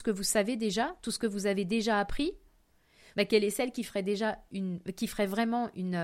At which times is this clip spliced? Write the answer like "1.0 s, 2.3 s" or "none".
3.1 s